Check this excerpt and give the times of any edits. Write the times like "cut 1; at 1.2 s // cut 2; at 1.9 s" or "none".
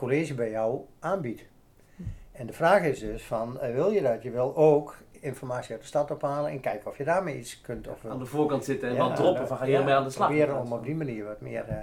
none